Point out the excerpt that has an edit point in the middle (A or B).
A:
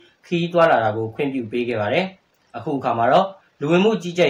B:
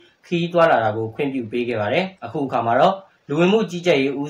B